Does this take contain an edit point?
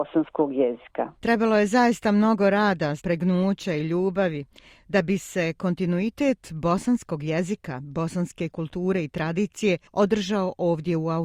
yes; 2 cuts; at 1.2 s, 3.0 s

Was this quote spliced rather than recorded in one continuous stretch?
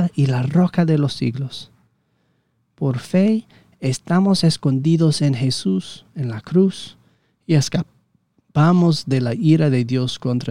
no; 0 cuts

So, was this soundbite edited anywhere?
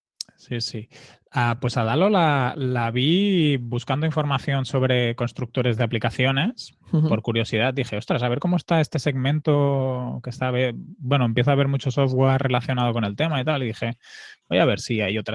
no; 0 cuts

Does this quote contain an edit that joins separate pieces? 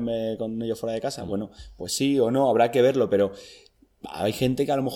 no; 0 cuts

